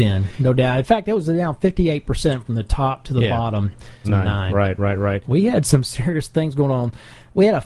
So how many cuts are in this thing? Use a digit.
2